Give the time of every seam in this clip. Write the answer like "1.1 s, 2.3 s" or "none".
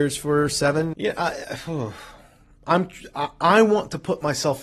0.9 s